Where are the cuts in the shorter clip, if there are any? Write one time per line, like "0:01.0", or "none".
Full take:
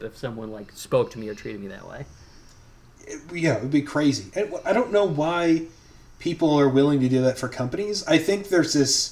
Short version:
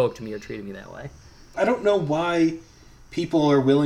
0:01.5